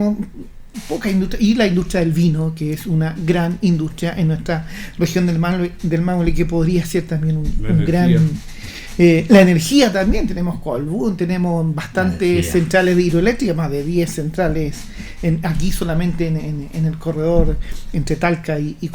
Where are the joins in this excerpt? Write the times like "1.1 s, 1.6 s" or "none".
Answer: 16.4 s